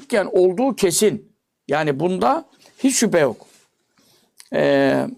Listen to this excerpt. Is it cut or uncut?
uncut